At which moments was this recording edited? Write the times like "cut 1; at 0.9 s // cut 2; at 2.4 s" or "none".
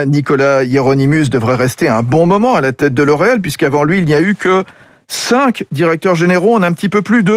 none